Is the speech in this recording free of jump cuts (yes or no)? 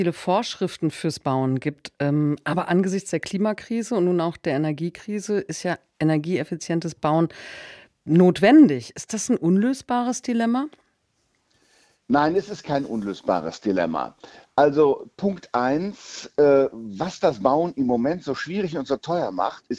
yes